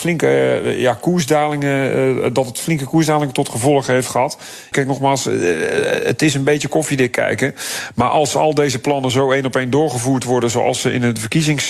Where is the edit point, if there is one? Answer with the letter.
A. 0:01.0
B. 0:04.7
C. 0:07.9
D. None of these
B